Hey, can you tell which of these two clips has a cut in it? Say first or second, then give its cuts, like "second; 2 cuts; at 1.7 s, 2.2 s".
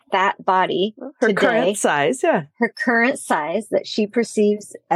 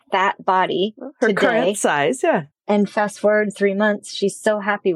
second; 1 cut; at 2.5 s